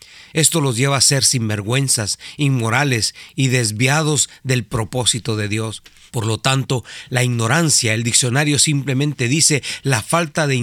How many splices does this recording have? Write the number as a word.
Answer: one